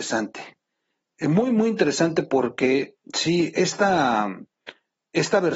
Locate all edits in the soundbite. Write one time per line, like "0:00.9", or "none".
none